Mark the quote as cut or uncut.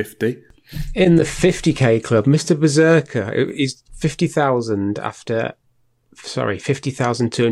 uncut